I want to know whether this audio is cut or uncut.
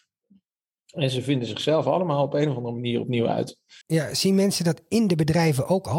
cut